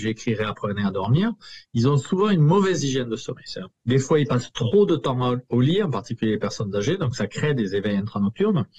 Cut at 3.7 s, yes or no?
yes